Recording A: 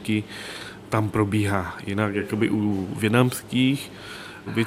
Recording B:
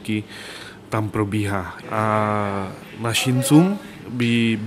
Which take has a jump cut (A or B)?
B